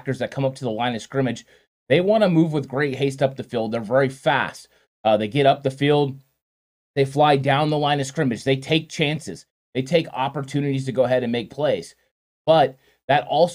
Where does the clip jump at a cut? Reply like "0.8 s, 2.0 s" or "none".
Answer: none

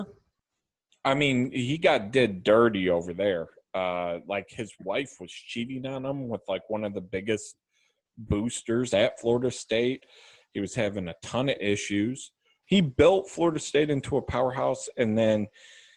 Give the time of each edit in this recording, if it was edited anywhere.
12.6 s

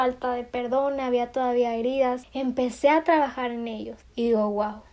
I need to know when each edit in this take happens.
2.2 s, 4.0 s

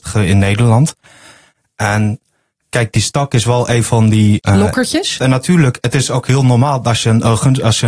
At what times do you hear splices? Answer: 5.2 s

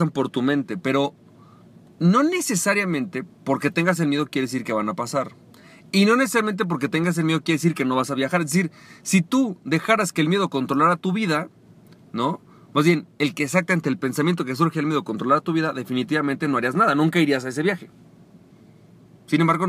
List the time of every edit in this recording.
none

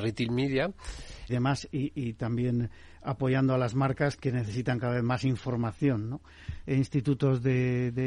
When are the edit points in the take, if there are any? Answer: 1.3 s, 6.6 s

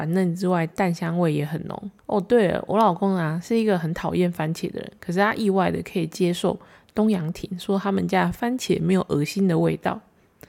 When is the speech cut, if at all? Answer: 2.0 s

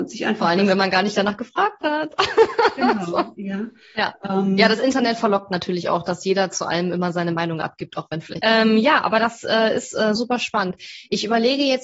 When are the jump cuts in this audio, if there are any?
8.4 s, 10.2 s

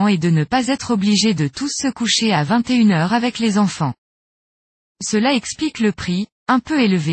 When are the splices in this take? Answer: 4.8 s

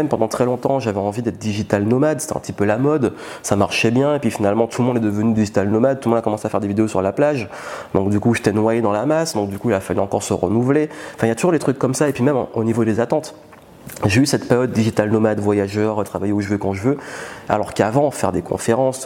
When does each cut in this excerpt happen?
17.5 s

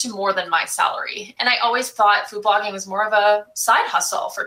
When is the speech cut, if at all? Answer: 1.4 s

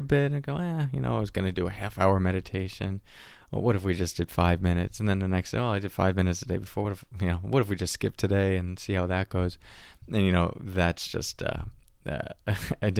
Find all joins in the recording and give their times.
none

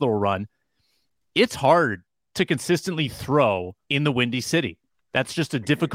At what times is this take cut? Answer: 3.8 s

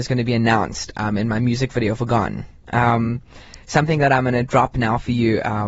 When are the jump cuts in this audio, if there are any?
2.7 s

